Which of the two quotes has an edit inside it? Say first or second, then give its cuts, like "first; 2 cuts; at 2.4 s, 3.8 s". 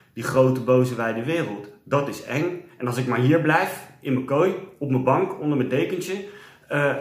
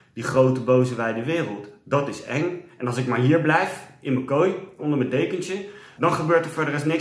second; 2 cuts; at 4.8 s, 6.0 s